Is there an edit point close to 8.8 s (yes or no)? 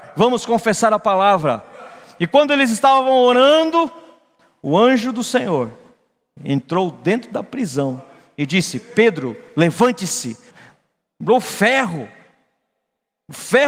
no